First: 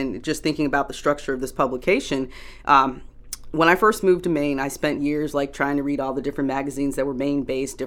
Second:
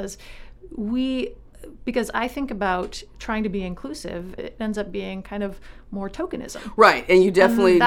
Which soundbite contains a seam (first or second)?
second